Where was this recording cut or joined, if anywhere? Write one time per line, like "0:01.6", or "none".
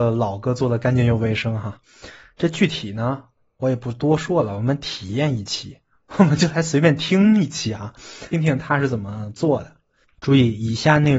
0:08.3